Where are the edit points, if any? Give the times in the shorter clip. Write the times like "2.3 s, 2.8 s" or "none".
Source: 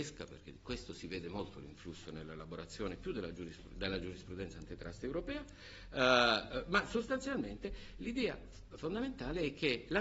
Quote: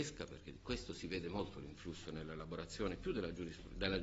none